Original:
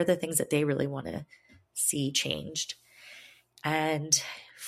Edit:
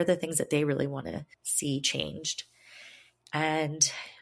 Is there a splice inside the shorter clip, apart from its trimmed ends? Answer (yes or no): yes